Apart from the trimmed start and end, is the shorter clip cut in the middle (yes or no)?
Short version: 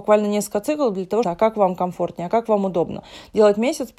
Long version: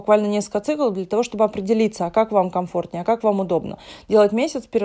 yes